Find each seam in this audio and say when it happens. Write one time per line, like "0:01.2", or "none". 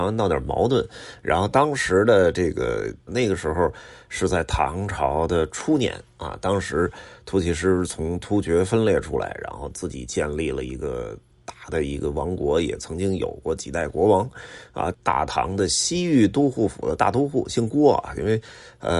0:03.1
0:14.9